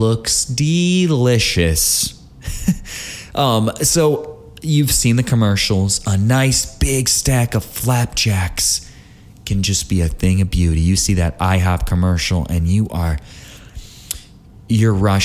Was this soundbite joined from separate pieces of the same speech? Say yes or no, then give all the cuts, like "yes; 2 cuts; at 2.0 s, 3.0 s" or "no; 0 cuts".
no; 0 cuts